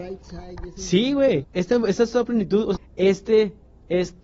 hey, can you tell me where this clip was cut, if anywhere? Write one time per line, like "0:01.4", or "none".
0:01.4
0:02.8